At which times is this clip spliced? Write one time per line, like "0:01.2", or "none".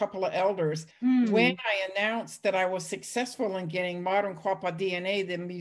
0:00.9